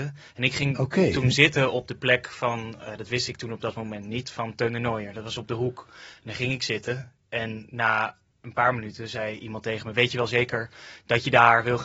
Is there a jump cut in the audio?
no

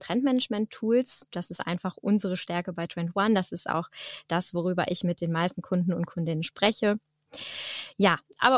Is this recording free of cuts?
yes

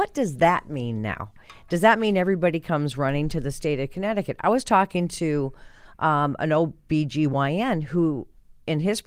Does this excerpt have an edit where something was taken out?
no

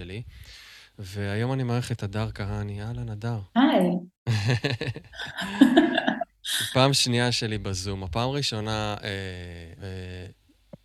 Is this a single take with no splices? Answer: no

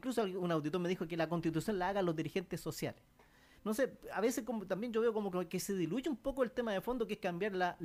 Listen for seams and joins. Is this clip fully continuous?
no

